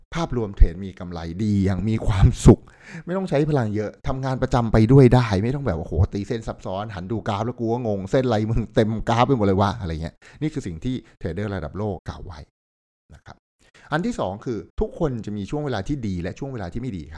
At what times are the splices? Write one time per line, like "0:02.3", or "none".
0:12.0
0:14.7